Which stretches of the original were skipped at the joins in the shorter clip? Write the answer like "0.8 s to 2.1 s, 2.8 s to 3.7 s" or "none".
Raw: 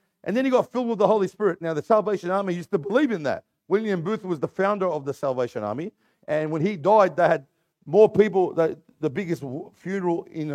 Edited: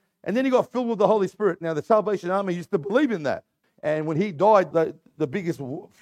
3.6 s to 6.1 s, 7.2 s to 8.5 s